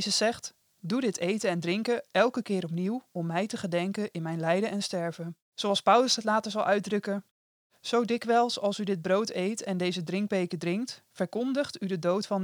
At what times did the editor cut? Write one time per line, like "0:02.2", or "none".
0:05.4